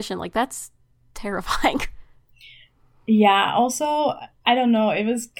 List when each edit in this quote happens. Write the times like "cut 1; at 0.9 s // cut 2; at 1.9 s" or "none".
none